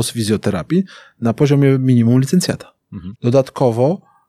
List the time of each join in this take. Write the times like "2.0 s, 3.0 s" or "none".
3.1 s